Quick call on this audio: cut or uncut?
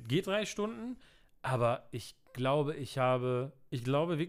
uncut